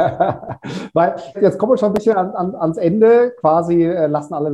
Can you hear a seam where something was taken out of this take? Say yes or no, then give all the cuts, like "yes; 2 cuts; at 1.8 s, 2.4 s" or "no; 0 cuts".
yes; 1 cut; at 1.3 s